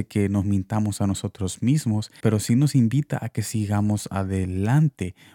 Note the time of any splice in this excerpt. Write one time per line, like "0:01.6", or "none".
0:02.2